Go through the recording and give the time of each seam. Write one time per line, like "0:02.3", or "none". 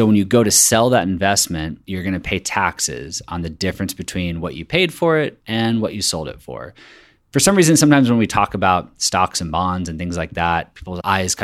none